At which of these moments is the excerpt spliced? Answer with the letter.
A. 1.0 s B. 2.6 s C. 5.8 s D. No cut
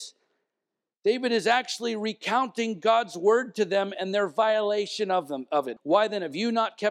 C